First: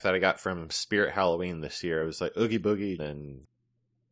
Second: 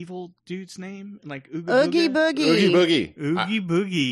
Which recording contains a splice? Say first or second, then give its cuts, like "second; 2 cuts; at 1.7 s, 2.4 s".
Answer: first; 1 cut; at 3.0 s